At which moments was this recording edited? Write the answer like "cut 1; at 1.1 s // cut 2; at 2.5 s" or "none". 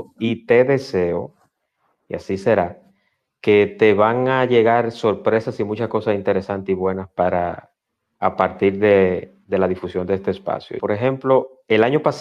cut 1; at 10.8 s